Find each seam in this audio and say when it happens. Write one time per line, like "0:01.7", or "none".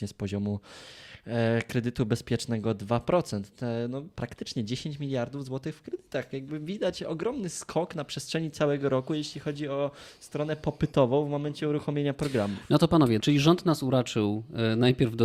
0:13.2